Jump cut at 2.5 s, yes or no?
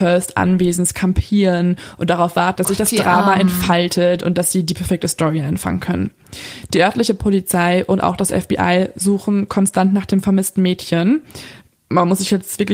yes